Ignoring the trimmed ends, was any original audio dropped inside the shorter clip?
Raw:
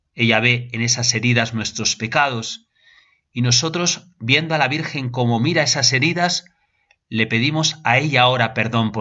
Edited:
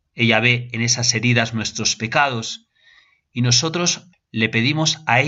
yes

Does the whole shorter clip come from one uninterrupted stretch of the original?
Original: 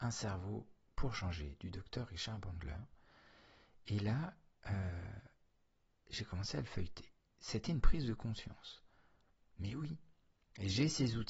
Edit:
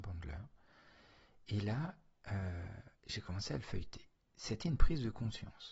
no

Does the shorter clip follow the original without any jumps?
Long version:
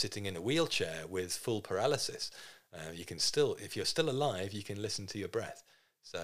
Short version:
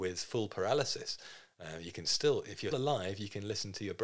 no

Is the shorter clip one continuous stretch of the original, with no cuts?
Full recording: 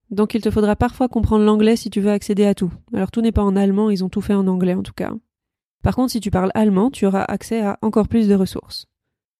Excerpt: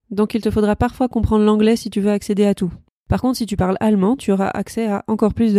no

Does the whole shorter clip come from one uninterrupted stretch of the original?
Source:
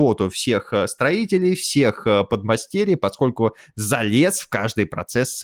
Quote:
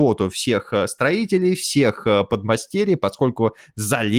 yes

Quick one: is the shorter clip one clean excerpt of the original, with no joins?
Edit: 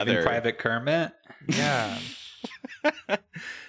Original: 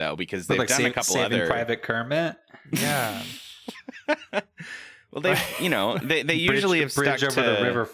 yes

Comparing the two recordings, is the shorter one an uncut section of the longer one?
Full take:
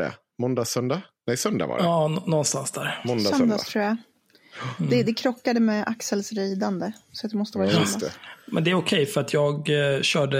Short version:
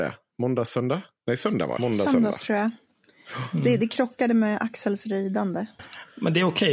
no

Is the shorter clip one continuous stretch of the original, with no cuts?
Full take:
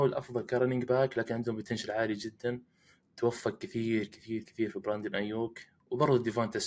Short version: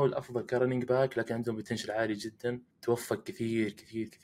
no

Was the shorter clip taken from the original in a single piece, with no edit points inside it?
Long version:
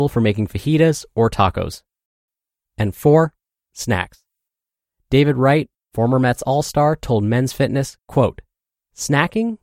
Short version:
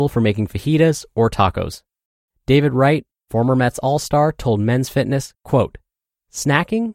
no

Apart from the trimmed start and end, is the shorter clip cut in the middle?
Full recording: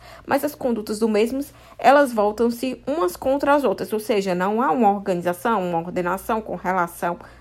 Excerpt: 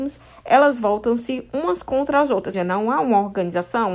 yes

